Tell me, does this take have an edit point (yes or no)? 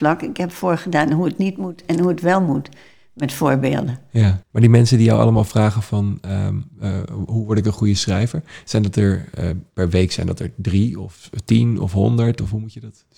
yes